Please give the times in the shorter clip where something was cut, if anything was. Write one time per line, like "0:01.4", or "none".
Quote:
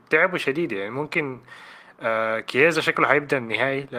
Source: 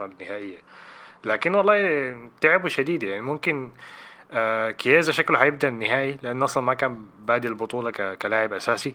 none

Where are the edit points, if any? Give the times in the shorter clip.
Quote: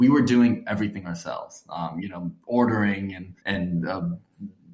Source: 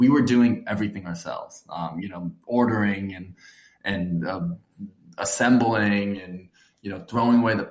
0:03.4

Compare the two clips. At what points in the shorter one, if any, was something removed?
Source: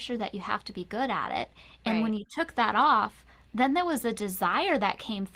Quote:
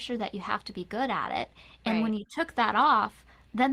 none

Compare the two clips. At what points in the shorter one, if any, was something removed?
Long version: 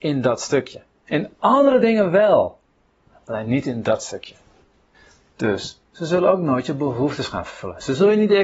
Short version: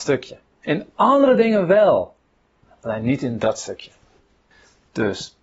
none

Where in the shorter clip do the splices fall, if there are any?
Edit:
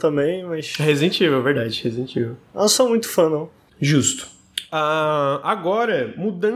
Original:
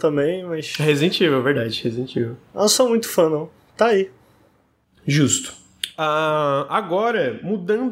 0:03.7

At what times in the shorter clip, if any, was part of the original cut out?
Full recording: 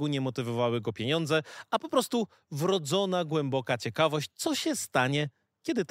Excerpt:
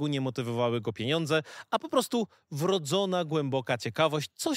none

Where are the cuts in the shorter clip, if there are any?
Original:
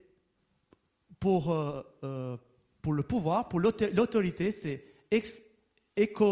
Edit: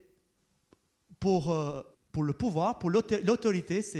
0:01.9

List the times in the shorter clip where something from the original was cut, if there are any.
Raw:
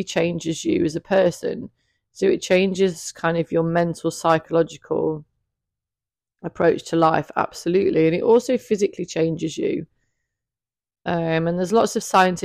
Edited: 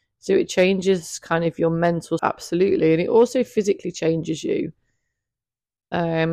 0:02.2

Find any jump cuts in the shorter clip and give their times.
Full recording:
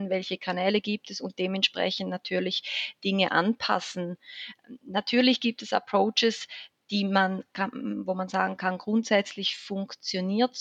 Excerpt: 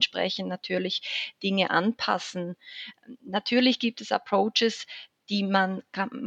none

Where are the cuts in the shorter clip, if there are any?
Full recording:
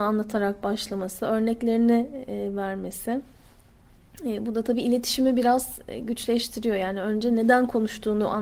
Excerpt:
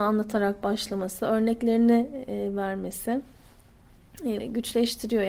0:04.4

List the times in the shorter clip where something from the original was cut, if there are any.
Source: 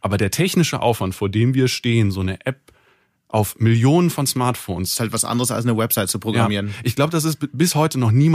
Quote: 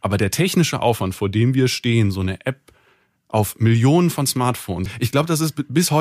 0:04.9

